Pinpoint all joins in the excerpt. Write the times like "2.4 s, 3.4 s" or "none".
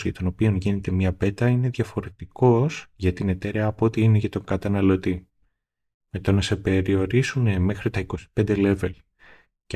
6.0 s